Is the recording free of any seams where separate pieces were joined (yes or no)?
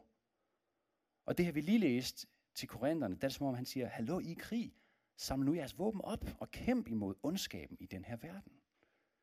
yes